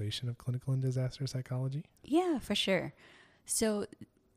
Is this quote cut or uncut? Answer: uncut